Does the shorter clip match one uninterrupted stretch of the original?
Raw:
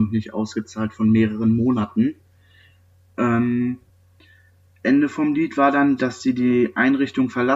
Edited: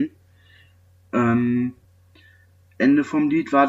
yes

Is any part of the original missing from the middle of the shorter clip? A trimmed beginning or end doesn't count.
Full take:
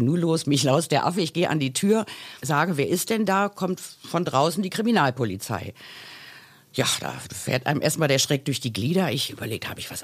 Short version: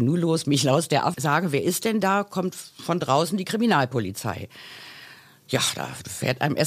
yes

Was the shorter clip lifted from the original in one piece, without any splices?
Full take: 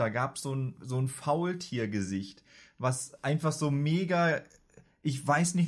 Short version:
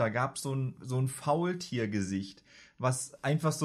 yes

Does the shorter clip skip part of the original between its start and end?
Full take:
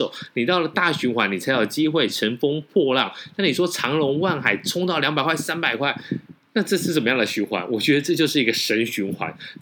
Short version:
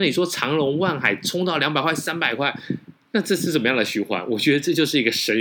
no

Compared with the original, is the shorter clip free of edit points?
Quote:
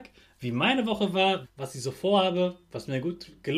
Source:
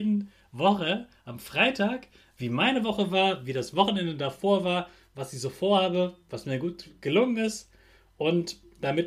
no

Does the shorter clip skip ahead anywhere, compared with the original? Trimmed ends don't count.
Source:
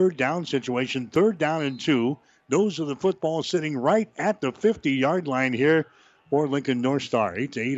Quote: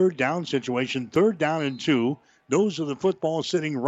no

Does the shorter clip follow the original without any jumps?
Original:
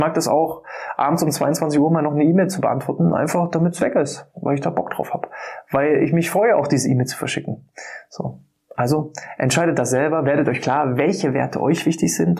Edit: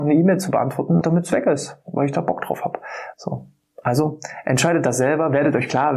no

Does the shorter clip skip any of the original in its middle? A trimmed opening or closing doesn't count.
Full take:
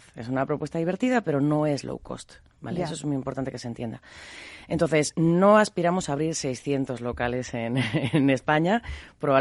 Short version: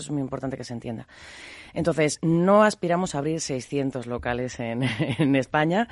no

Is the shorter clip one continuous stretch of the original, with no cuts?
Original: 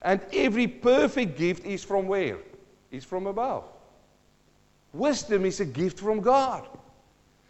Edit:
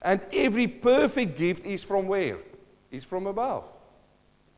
yes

